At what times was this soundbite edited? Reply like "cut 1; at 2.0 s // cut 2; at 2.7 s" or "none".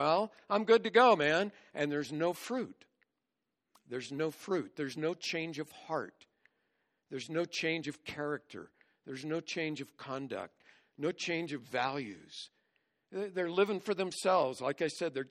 none